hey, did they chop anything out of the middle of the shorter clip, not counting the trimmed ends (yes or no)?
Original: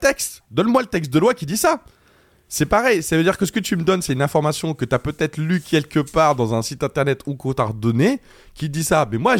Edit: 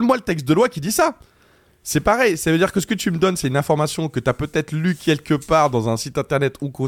no